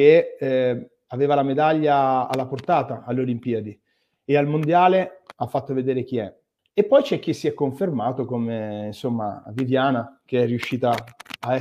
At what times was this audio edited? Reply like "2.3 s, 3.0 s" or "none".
6.6 s